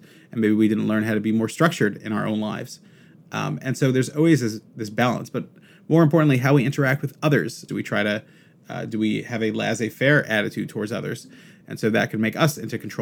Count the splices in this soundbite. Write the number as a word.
two